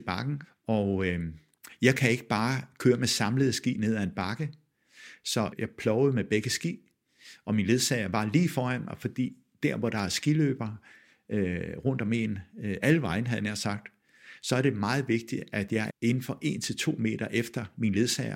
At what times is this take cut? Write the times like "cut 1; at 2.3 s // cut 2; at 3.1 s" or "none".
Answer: cut 1; at 15.9 s